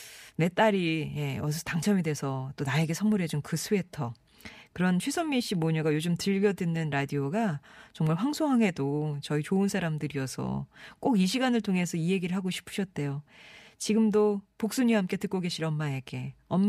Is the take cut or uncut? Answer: uncut